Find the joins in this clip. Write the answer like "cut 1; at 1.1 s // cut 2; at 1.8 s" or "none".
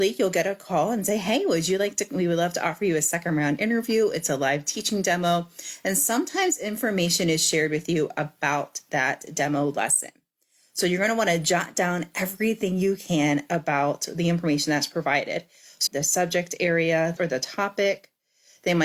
cut 1; at 15.9 s // cut 2; at 17.2 s